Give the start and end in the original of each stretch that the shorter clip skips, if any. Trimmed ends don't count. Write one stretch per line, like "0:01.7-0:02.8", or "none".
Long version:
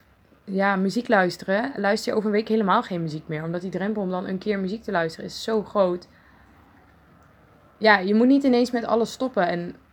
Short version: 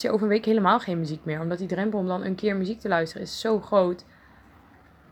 none